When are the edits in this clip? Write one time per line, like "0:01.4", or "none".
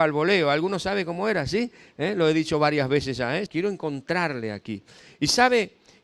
0:03.5